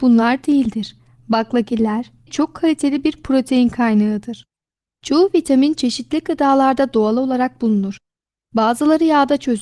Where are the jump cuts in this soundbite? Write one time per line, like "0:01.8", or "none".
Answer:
0:02.2
0:04.9